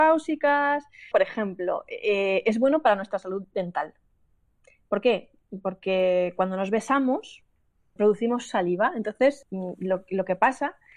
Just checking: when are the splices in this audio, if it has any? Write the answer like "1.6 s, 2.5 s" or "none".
1.1 s, 8.0 s, 9.4 s